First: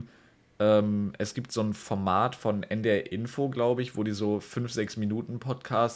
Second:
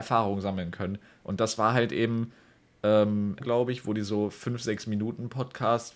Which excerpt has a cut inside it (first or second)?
second